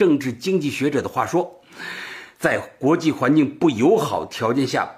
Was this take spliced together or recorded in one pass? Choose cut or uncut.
cut